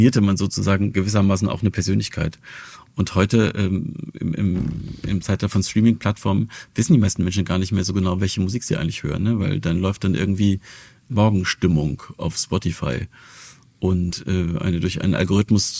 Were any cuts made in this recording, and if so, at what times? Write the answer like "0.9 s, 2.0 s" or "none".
none